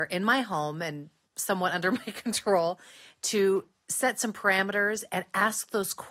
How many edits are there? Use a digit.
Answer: 0